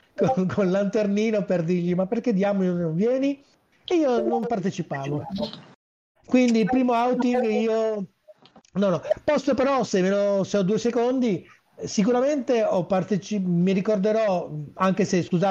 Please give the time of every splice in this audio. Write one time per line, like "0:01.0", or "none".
none

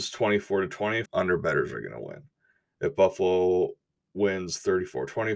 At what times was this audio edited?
0:01.1

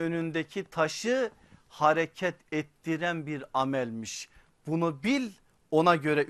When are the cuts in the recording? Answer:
none

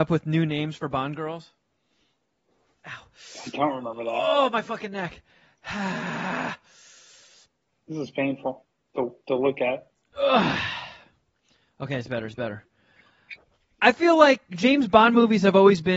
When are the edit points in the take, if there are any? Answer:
none

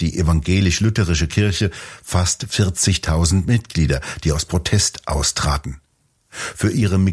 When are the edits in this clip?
none

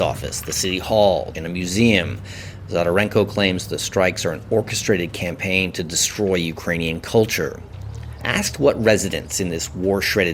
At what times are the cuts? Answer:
0:01.3
0:08.2

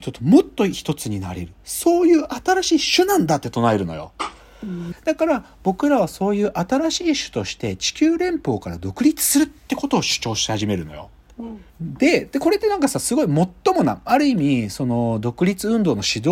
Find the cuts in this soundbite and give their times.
0:04.9
0:11.7

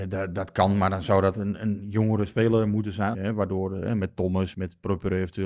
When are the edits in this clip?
0:03.1
0:04.5

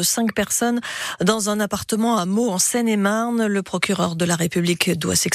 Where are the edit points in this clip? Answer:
none

